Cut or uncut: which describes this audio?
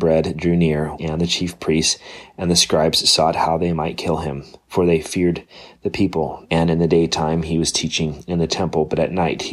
cut